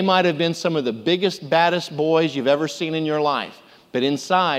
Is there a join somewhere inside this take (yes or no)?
no